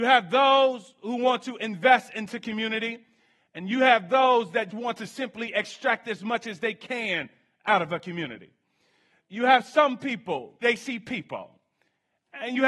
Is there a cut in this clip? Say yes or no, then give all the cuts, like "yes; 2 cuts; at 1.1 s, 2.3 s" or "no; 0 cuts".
yes; 2 cuts; at 4.7 s, 10.6 s